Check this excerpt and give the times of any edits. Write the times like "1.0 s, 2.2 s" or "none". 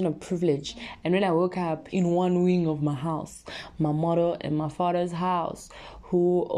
1.9 s